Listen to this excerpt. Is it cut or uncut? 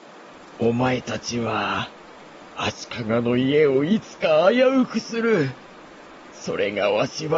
uncut